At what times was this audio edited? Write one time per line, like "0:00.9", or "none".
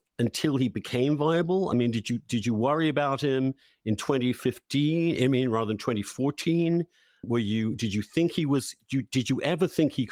none